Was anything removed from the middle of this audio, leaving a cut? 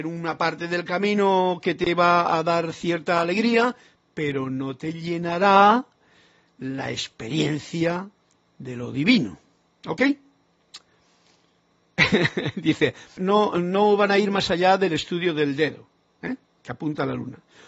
yes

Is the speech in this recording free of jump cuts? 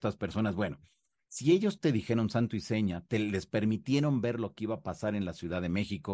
yes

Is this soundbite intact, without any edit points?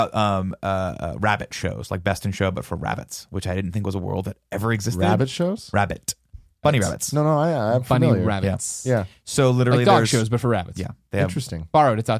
no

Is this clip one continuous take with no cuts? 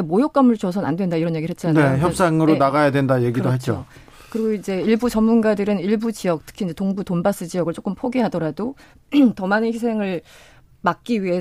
yes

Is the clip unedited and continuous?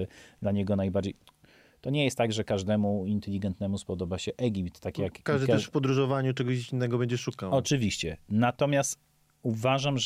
yes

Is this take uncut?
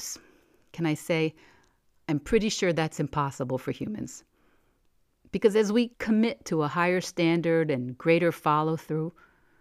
yes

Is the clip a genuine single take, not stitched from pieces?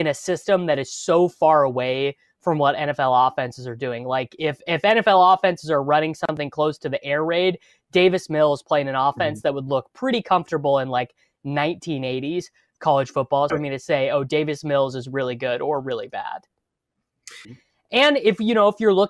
no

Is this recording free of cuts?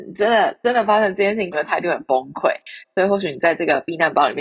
no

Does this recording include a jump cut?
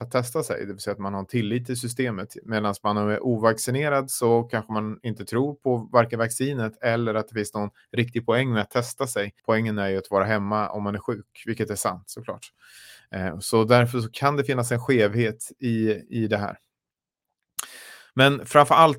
yes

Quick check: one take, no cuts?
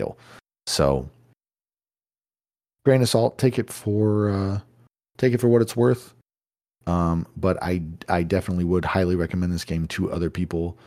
yes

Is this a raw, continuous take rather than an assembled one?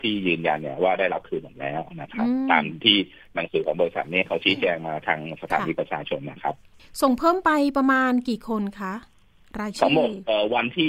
yes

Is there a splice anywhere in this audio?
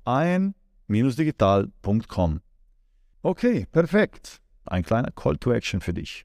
yes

